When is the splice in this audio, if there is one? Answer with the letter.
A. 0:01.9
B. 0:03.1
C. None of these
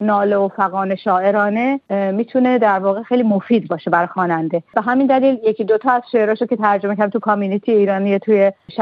A